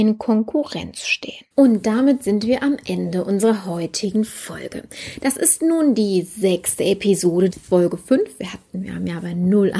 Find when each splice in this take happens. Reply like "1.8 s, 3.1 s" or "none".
1.5 s, 7.5 s